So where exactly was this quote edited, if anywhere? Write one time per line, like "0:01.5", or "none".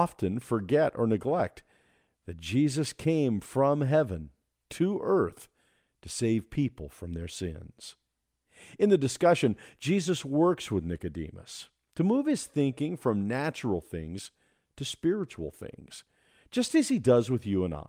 none